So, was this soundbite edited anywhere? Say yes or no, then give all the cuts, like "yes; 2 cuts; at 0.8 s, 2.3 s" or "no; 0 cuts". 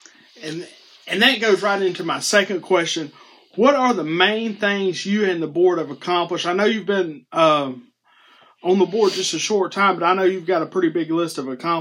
no; 0 cuts